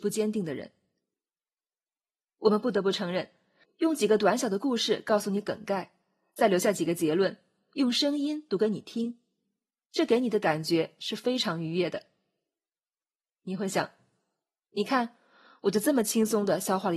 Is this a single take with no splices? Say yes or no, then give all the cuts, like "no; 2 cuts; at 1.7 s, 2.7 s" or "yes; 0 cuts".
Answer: no; 1 cut; at 3.6 s